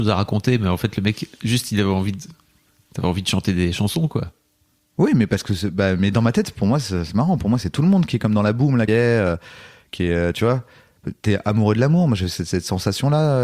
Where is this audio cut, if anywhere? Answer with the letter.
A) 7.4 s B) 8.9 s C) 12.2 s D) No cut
B